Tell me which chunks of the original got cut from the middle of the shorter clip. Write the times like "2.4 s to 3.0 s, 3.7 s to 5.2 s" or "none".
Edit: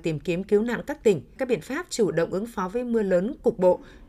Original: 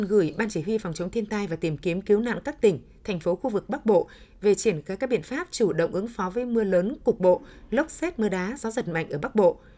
2.9 s to 5.0 s